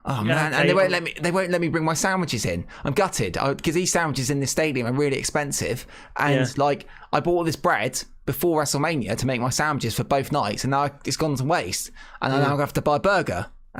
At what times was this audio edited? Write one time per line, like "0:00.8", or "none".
none